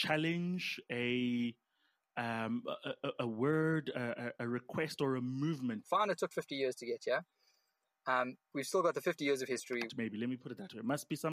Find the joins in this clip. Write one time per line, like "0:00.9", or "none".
0:05.8
0:08.5
0:09.9